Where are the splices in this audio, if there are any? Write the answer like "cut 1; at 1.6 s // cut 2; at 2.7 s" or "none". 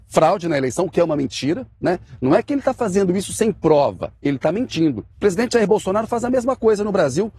cut 1; at 5.1 s